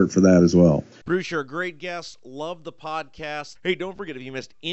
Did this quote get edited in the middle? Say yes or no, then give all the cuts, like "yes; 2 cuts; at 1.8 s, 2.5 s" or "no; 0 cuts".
yes; 1 cut; at 3.5 s